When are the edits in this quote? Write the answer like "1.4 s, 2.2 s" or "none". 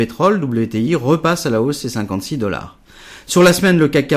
none